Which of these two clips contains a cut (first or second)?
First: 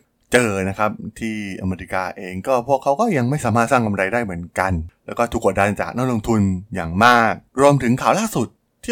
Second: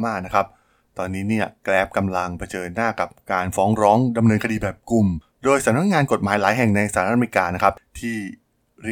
first